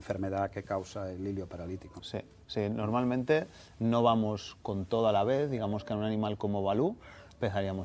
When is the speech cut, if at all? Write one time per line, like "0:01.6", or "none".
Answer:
0:02.0